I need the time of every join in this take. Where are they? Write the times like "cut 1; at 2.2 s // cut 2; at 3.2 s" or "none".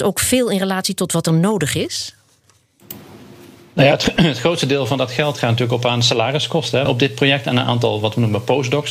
cut 1; at 6.9 s